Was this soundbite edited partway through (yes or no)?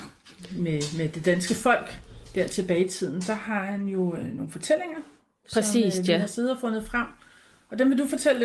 no